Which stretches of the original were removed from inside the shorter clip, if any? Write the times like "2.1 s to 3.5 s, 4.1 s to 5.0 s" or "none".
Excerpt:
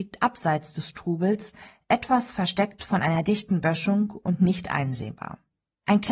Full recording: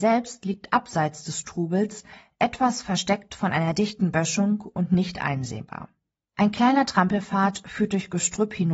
none